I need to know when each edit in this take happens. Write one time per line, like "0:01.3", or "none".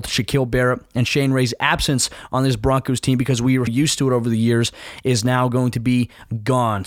0:03.7